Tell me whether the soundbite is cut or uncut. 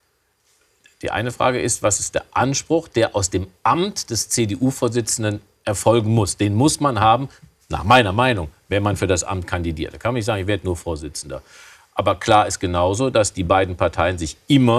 uncut